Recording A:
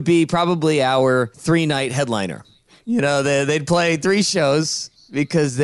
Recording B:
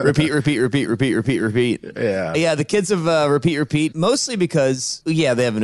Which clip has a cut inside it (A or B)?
B